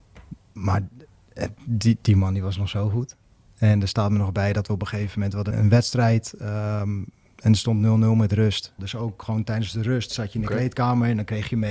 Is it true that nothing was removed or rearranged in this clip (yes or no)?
no